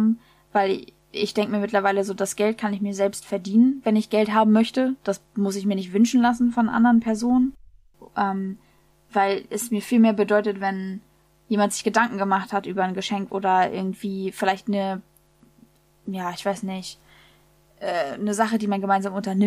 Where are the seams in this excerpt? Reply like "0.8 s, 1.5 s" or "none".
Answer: 13.3 s